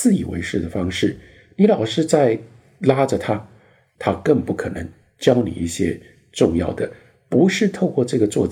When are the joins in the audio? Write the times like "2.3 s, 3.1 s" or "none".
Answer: 4.0 s

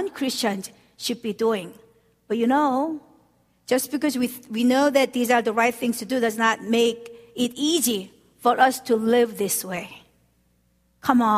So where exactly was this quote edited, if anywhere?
none

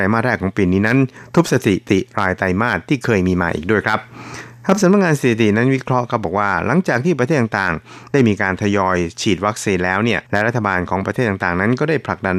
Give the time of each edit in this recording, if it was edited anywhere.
10.2 s

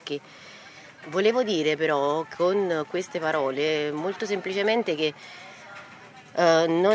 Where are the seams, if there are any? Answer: 1.0 s

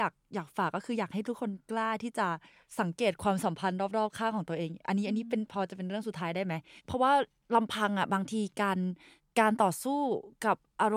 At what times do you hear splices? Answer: none

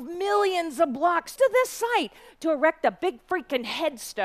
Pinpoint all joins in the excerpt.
1.4 s

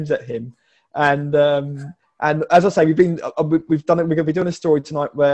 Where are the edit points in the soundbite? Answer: none

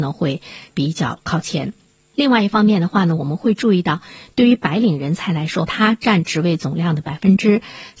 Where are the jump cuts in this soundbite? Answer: 5.7 s

